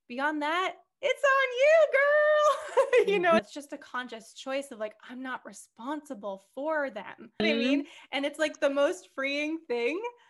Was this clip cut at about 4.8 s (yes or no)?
no